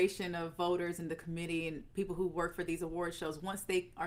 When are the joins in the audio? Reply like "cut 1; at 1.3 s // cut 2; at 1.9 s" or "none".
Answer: none